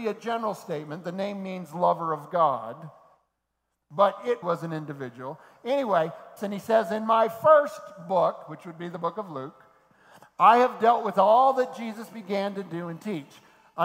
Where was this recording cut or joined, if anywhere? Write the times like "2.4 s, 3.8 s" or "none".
4.4 s, 6.4 s

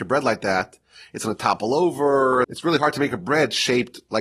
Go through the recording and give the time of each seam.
2.4 s

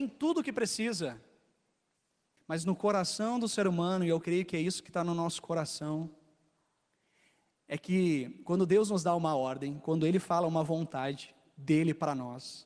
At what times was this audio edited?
2.4 s

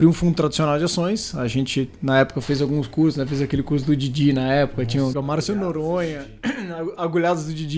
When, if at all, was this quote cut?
5.1 s

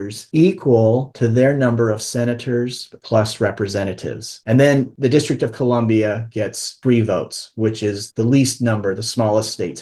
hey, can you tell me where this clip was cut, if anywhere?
8.1 s

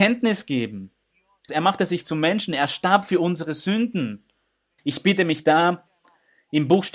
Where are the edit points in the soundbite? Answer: 1.5 s, 4.8 s

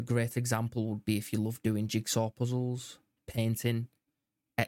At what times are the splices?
3.2 s

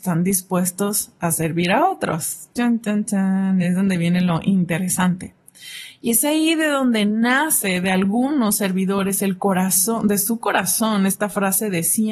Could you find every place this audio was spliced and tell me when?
none

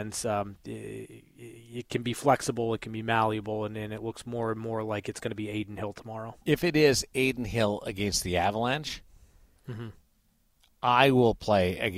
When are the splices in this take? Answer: 6.4 s

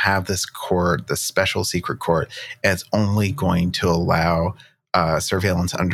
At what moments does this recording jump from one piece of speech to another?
none

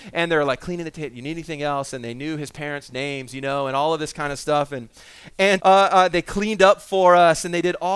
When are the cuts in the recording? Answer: 5.6 s

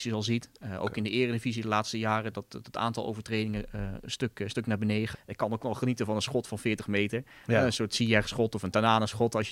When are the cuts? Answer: 5.1 s

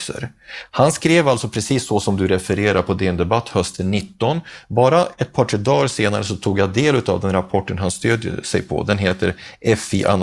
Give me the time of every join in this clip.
none

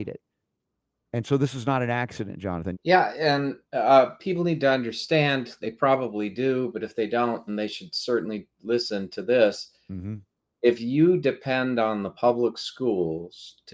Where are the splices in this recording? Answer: 2.7 s, 7.5 s

